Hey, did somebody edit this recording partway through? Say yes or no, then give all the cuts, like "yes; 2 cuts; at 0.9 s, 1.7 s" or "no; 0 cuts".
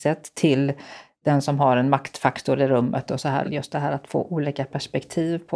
yes; 1 cut; at 3.4 s